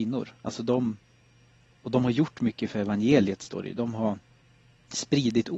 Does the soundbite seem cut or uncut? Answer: uncut